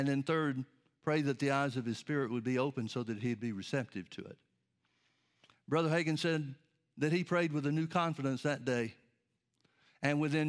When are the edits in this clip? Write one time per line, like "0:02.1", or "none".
none